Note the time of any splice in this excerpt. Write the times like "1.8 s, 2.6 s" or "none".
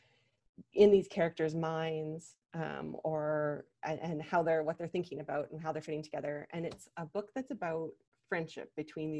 none